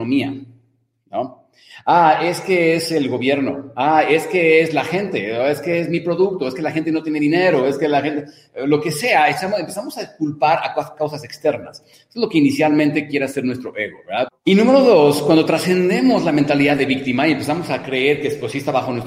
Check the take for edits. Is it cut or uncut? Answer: cut